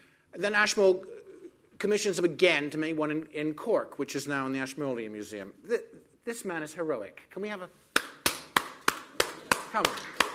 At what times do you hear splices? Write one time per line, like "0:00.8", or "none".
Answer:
none